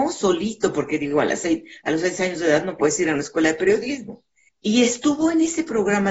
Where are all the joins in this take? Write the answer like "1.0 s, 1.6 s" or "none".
4.5 s